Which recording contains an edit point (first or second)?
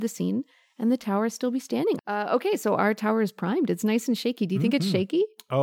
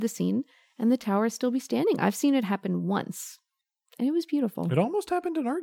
first